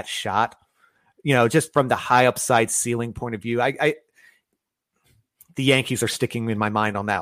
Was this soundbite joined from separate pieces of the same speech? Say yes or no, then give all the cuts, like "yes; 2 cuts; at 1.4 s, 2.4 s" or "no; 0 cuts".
no; 0 cuts